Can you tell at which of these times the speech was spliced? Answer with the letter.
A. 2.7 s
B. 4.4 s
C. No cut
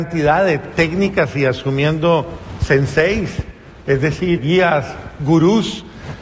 B